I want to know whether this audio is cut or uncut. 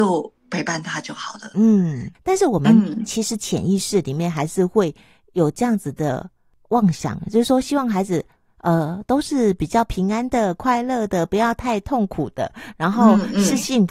cut